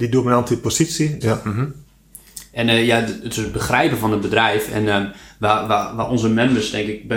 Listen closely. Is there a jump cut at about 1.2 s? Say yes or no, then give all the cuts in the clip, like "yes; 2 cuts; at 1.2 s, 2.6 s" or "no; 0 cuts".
yes; 1 cut; at 1.2 s